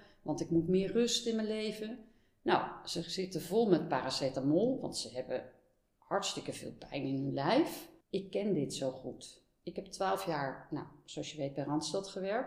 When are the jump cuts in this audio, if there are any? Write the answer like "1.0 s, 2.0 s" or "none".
8.0 s